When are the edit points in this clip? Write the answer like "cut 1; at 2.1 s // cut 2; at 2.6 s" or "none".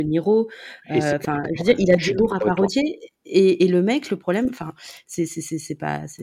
none